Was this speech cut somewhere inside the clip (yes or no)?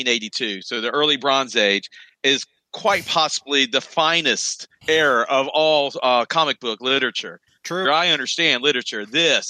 yes